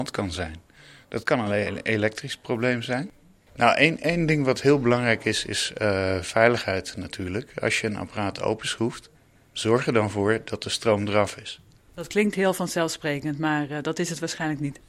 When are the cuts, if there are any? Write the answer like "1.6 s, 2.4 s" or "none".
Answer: 3.5 s, 11.9 s